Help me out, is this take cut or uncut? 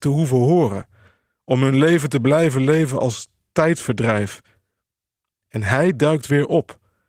uncut